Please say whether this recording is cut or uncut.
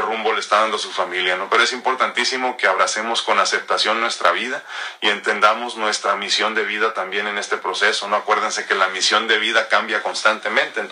uncut